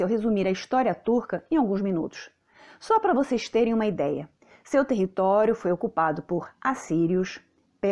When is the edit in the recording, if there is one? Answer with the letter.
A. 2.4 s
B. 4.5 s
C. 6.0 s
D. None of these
D